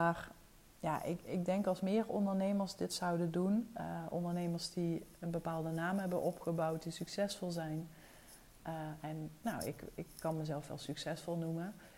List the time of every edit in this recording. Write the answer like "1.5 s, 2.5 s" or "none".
none